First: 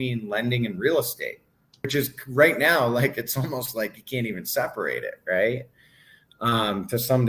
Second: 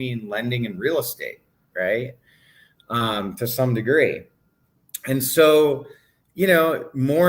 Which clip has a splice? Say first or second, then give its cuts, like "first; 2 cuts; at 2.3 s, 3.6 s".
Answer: second; 1 cut; at 1.7 s